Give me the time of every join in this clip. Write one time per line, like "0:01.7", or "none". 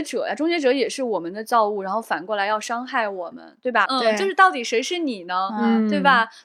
0:03.9